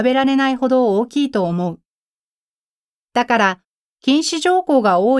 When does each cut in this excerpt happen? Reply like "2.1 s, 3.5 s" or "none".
3.9 s